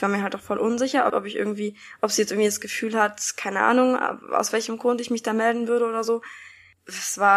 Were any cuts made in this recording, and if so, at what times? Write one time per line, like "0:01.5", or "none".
0:01.1